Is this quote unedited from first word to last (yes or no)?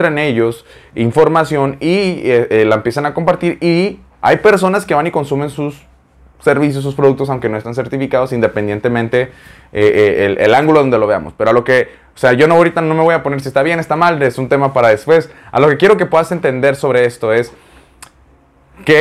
yes